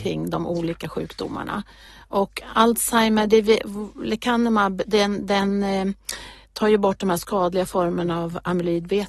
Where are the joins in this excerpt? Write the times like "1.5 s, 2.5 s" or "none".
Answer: none